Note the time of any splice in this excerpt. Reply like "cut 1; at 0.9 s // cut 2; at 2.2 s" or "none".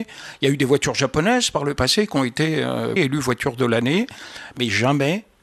cut 1; at 3.0 s

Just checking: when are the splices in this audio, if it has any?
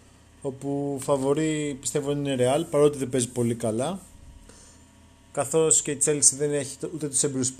none

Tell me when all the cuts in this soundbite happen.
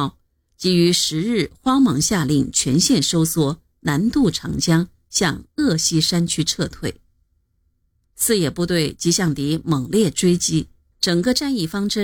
cut 1; at 10.9 s

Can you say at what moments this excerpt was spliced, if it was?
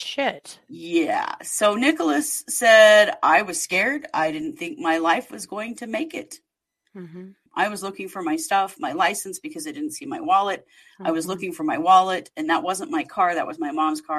cut 1; at 7.5 s

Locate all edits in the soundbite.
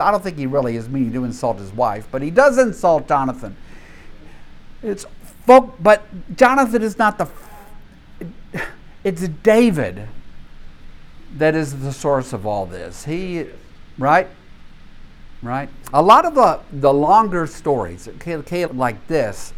cut 1; at 15.8 s // cut 2; at 18.7 s

